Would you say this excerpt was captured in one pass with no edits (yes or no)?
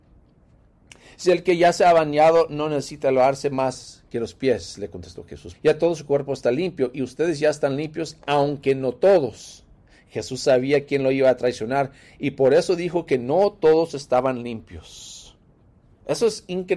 no